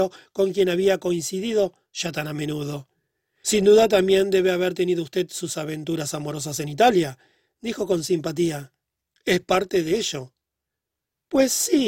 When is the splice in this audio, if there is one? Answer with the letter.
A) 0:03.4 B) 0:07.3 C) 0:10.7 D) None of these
A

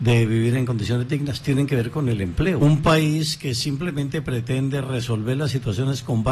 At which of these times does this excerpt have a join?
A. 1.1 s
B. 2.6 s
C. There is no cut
B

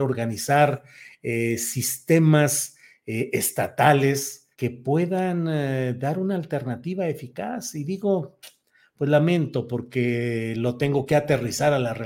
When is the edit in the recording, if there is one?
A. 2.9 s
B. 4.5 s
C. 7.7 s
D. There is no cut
B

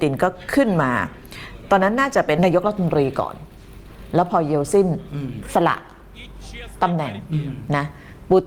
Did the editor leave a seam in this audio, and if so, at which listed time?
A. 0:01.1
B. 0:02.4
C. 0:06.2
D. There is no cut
B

